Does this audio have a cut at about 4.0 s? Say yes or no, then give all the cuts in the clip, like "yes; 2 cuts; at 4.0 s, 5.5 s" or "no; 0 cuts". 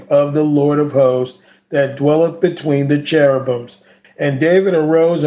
yes; 1 cut; at 4.0 s